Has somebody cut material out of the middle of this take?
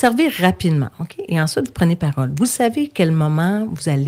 no; 0 cuts

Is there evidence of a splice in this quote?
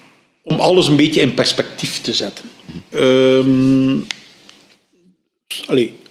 yes; 1 cut; at 2.9 s

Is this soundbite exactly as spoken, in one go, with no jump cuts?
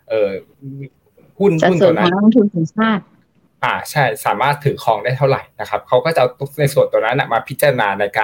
yes; 0 cuts

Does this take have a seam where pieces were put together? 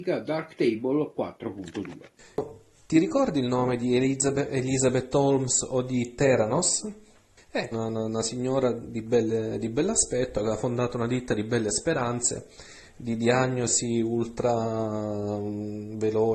yes; 1 cut; at 7.7 s

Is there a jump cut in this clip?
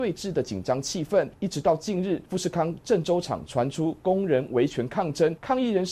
no; 0 cuts

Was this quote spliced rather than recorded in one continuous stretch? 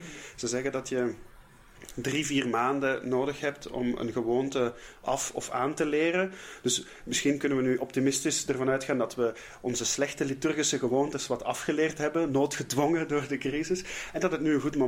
no; 0 cuts

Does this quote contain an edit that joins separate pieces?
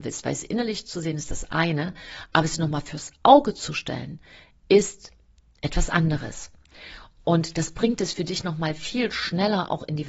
no; 0 cuts

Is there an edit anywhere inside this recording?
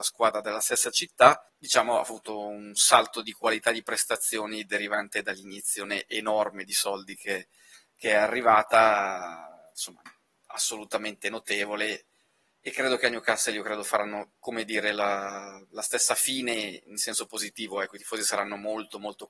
no; 0 cuts

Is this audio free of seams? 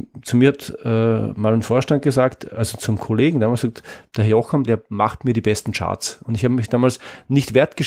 no; 1 cut; at 4.7 s

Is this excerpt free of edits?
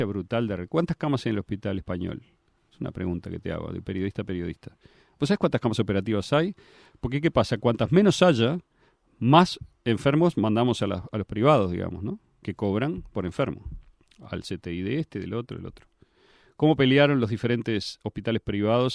yes; 0 cuts

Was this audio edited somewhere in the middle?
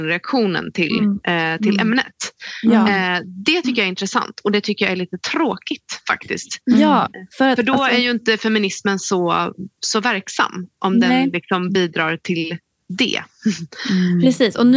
no; 0 cuts

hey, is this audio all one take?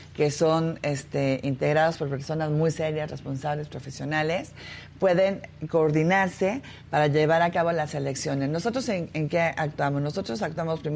yes; 0 cuts

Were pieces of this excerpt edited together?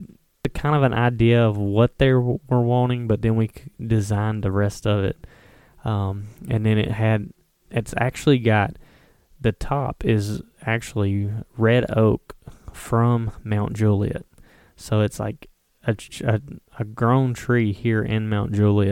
no; 0 cuts

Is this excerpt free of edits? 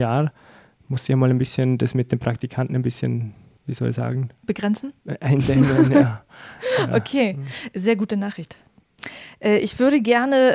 yes; 0 cuts

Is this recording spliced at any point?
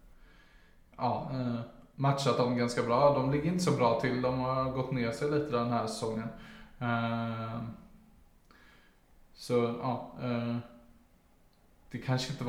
no; 0 cuts

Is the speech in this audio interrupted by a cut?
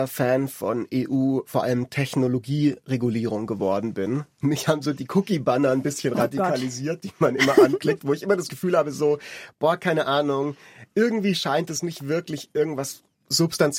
no; 0 cuts

